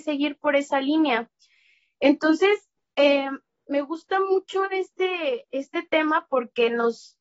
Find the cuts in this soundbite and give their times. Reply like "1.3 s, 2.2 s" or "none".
none